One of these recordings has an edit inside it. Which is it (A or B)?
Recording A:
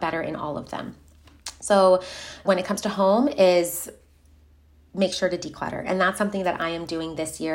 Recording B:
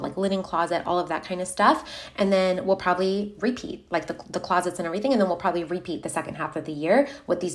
A